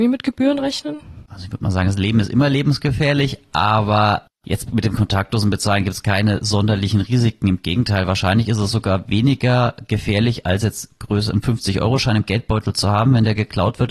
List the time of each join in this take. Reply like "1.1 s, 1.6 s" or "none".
1.3 s